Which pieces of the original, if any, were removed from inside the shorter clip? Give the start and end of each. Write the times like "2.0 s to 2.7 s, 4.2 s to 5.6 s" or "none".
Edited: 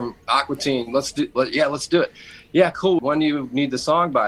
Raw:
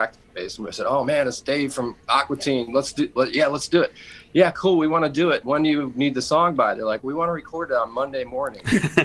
4.8 s to 5.4 s